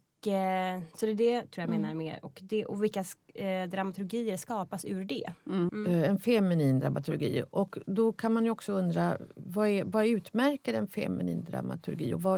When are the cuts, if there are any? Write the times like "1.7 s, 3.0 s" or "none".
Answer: 5.7 s

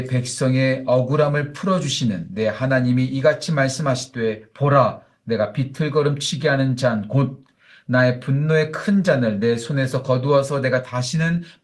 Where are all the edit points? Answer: none

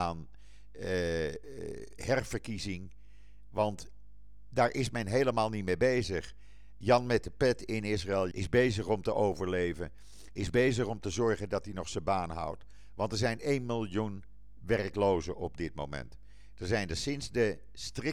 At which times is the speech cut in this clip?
8.3 s

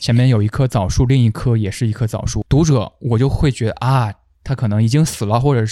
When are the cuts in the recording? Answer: 2.5 s

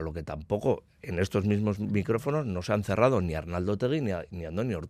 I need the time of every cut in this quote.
none

